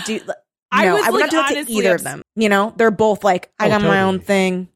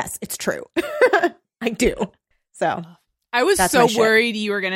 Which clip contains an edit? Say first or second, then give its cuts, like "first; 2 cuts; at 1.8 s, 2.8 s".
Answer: first; 1 cut; at 2.2 s